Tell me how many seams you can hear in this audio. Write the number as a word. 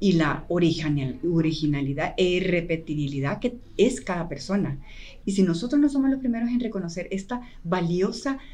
one